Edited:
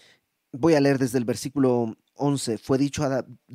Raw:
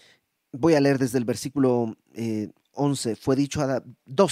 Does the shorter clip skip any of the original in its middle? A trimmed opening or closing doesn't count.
yes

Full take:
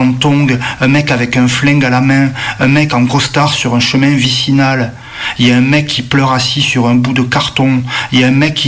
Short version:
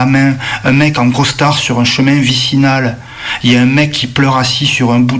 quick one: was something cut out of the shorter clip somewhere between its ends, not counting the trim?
no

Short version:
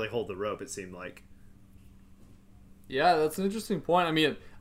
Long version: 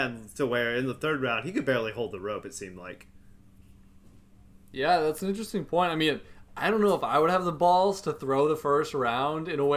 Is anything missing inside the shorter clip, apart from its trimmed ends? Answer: no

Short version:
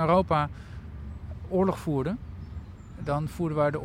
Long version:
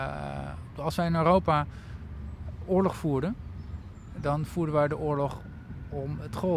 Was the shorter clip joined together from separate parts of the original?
no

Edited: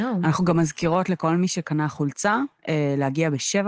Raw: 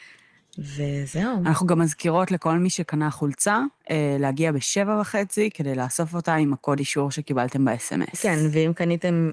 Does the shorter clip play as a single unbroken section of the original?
yes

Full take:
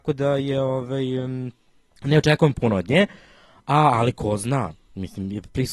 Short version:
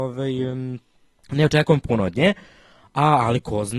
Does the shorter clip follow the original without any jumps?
yes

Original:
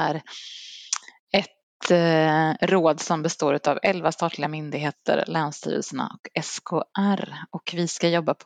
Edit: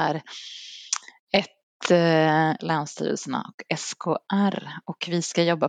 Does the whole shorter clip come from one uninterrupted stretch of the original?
no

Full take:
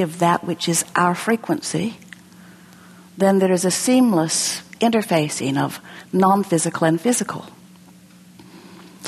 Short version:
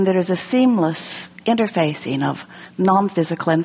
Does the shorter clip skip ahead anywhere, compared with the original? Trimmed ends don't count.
no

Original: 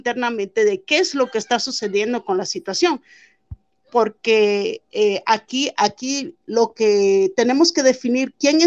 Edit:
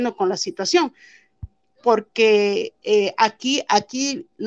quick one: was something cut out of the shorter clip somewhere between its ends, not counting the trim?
no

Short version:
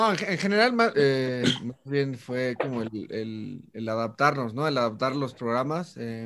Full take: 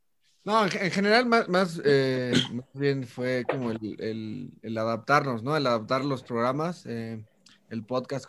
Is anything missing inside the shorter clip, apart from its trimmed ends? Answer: yes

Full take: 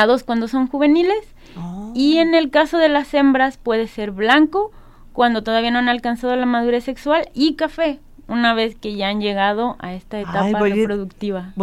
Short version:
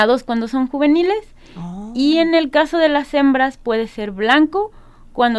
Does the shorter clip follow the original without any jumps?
yes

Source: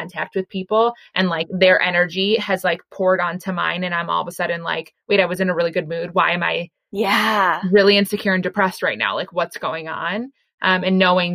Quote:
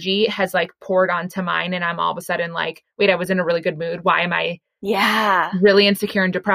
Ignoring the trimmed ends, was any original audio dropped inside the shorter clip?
no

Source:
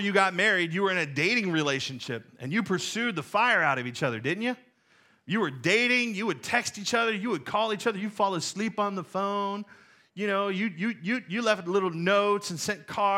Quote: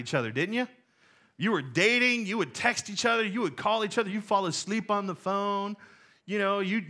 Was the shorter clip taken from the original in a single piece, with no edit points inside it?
yes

